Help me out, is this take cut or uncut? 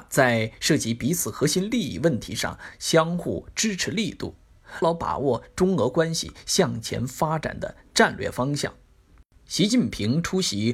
cut